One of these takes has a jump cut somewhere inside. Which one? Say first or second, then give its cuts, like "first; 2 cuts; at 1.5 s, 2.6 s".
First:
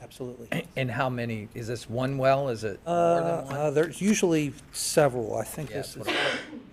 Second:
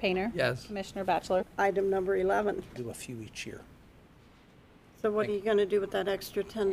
second; 2 cuts; at 1.4 s, 2.8 s